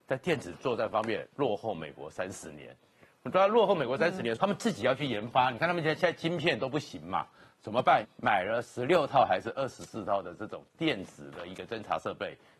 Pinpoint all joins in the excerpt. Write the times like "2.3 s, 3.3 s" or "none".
4.4 s, 8.0 s